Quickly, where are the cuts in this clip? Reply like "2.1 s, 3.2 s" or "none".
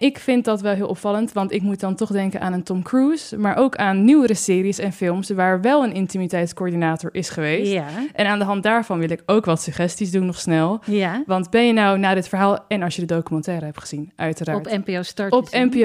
none